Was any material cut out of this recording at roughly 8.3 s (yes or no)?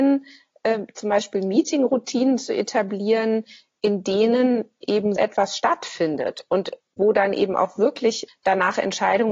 yes